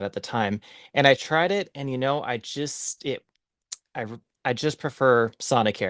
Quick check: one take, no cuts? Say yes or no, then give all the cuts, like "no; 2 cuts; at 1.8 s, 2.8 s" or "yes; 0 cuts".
yes; 0 cuts